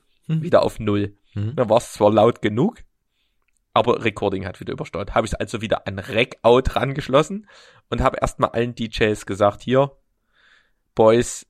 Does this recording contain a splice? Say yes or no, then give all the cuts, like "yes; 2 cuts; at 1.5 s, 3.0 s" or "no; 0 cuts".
no; 0 cuts